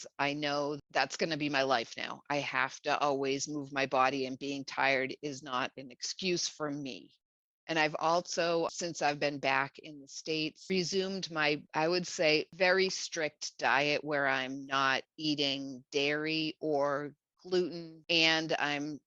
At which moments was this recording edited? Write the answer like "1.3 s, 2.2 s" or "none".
none